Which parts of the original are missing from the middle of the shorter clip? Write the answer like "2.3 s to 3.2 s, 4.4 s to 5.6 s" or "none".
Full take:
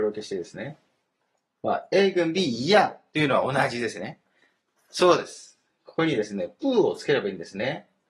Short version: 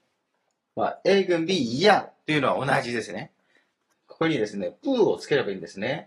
4.8 s to 5.7 s